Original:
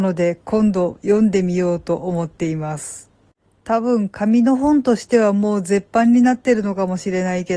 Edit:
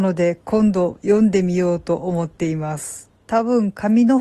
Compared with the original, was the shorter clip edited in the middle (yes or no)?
yes